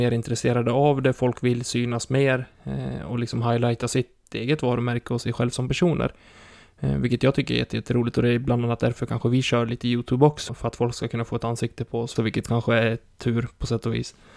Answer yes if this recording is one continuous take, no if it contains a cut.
no